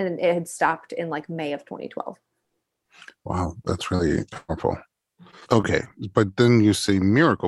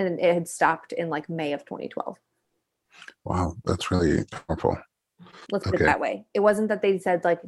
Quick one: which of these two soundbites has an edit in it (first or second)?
second